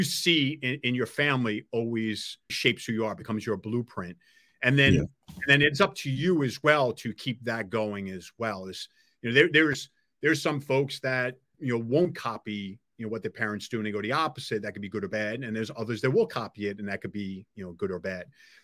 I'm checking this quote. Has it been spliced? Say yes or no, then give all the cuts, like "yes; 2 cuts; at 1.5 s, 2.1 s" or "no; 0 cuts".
yes; 2 cuts; at 2.5 s, 11.5 s